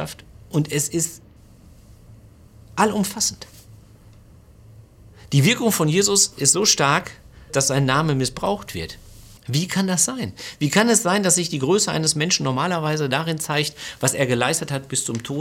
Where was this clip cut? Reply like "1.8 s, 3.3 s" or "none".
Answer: 7.5 s, 9.4 s